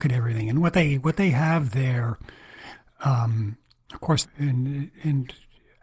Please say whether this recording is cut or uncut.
cut